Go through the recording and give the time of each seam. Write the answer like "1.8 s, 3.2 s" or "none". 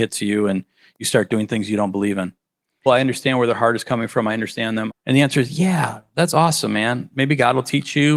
2.9 s, 4.9 s